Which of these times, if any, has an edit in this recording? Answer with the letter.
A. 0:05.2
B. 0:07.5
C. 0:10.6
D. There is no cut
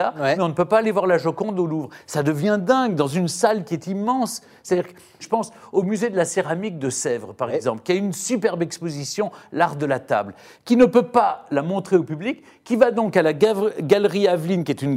A